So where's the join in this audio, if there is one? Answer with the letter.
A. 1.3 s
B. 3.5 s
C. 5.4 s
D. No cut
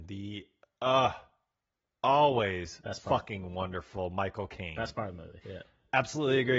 C